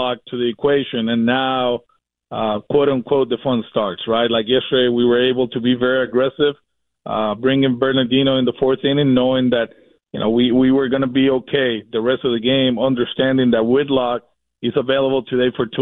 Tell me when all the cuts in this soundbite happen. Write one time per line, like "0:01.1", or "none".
none